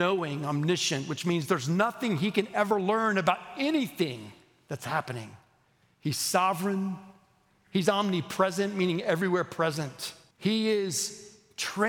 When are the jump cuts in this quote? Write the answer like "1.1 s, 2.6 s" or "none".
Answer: 10.3 s